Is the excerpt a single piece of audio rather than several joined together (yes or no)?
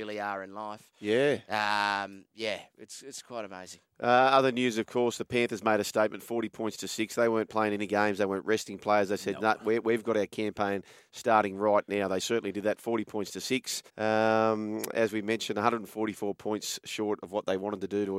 no